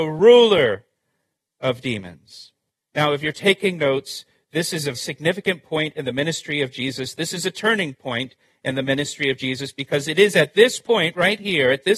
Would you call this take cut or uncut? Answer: cut